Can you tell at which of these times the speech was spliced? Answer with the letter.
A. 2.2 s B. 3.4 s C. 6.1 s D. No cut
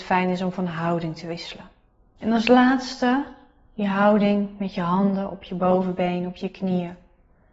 A